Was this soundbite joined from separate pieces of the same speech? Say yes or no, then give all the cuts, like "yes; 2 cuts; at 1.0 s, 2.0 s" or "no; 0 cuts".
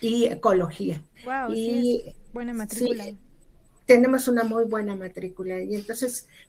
yes; 1 cut; at 1.1 s